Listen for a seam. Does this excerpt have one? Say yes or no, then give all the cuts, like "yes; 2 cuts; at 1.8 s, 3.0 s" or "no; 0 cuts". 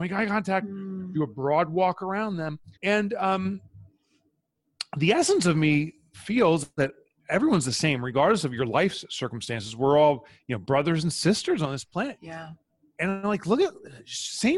yes; 1 cut; at 2.8 s